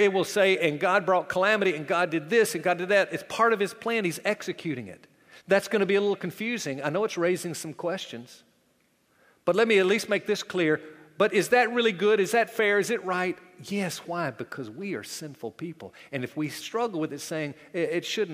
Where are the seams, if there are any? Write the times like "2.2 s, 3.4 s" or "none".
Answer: none